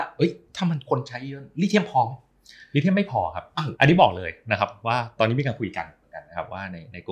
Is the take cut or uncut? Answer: cut